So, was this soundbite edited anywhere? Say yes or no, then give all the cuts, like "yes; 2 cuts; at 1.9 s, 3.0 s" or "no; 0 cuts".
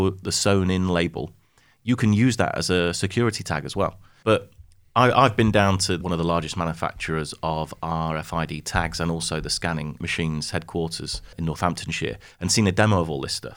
yes; 1 cut; at 4.2 s